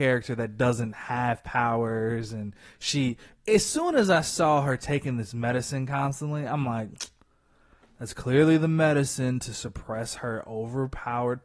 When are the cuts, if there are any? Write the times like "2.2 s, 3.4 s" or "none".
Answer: none